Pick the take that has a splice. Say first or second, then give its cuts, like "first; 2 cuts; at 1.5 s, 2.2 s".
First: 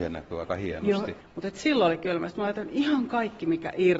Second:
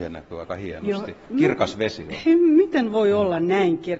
first; 1 cut; at 1.2 s